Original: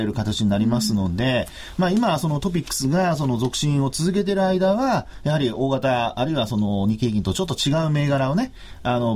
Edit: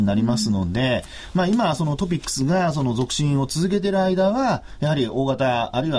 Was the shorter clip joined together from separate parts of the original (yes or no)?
no